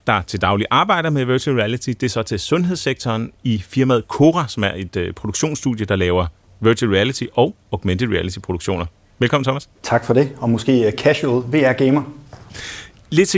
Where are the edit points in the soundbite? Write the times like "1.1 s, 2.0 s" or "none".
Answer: 9.7 s